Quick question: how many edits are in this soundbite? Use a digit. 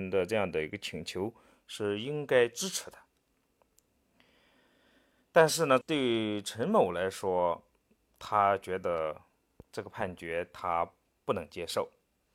1